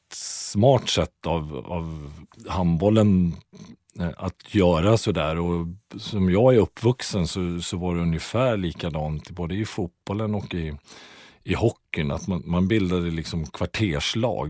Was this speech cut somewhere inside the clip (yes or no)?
no